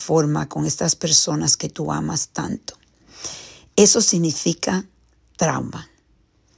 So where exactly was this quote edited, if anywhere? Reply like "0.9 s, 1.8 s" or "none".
none